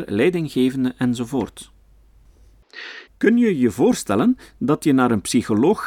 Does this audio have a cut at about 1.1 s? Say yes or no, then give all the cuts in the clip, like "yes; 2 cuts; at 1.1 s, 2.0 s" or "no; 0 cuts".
no; 1 cut; at 3.1 s